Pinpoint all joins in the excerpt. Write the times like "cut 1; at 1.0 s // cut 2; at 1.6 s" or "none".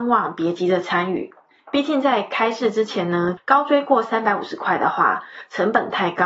cut 1; at 1.5 s // cut 2; at 3.4 s